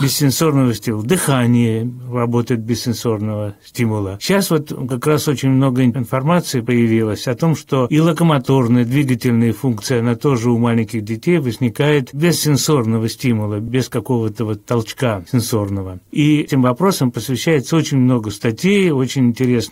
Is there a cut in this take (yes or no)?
no